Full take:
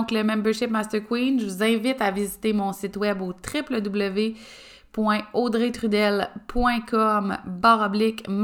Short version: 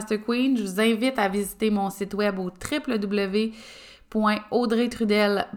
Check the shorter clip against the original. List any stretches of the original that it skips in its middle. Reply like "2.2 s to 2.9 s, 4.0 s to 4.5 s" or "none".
none